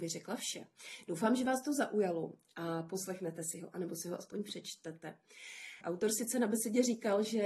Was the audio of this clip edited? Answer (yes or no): yes